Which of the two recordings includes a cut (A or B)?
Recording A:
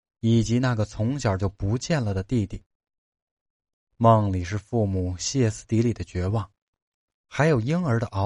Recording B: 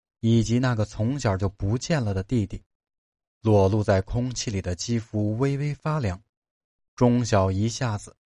B